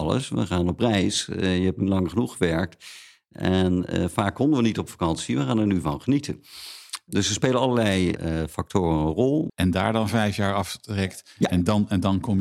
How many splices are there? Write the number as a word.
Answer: one